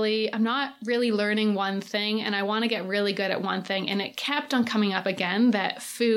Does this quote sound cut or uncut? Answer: uncut